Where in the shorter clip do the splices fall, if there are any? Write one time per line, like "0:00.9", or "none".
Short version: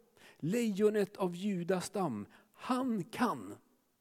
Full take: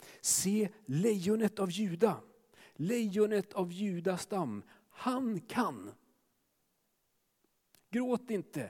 none